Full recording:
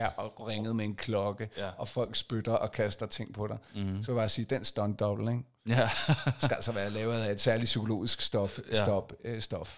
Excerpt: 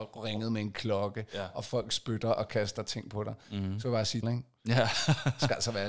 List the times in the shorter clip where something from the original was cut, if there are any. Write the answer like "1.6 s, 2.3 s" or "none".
4.2 s